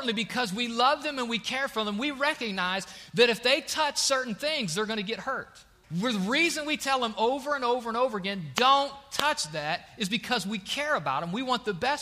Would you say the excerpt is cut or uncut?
cut